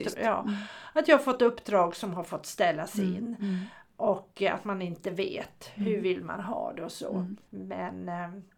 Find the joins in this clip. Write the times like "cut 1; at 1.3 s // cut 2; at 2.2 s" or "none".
cut 1; at 7.4 s